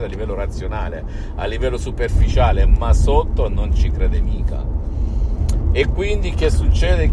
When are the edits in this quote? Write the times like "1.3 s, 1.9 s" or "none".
none

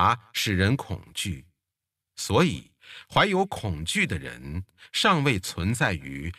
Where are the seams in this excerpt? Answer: none

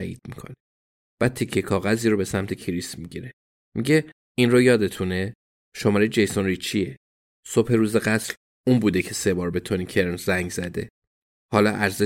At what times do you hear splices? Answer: none

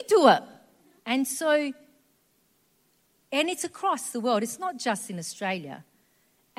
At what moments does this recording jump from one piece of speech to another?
1.0 s

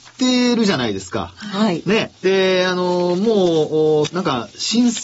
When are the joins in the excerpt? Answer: 2.2 s, 4.1 s

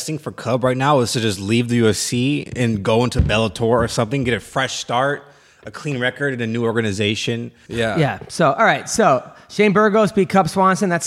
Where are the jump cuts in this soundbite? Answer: 7.7 s

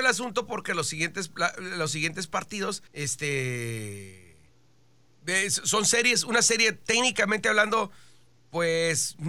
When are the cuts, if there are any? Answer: 2.9 s

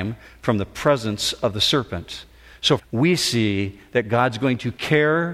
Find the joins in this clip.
2.8 s

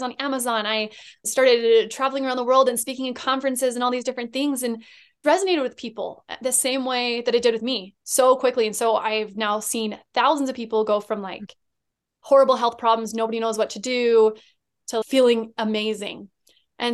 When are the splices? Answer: 5.2 s

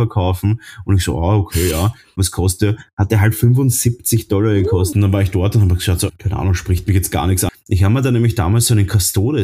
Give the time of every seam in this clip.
4.9 s, 6.1 s, 7.5 s

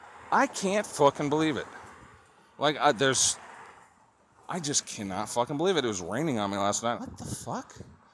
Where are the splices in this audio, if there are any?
7.0 s

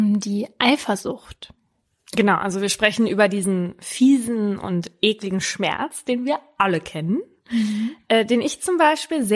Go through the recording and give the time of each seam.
none

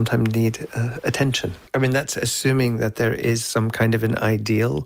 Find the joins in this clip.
1.7 s

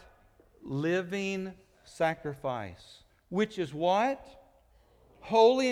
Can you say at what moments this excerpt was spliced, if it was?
none

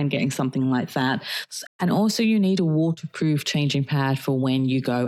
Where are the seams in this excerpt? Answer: 1.7 s

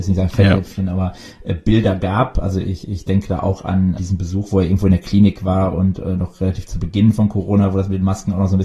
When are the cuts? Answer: 4.0 s

